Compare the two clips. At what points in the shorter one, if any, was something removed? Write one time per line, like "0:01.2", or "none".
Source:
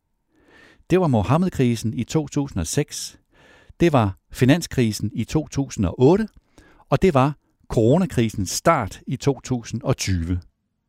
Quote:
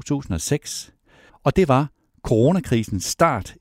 0:01.3